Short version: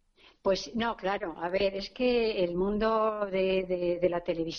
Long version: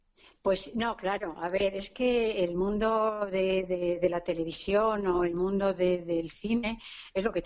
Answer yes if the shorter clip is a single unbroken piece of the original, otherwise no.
yes